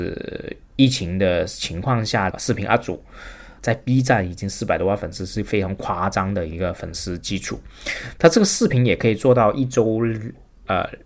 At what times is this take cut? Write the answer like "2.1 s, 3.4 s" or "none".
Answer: 2.3 s, 3.6 s